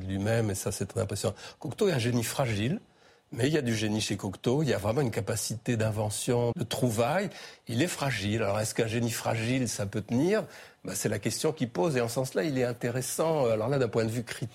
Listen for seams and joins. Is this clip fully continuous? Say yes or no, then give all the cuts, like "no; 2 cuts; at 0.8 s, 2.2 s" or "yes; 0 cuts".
no; 1 cut; at 6.5 s